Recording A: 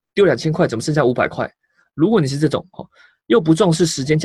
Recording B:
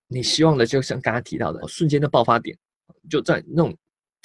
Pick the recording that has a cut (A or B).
B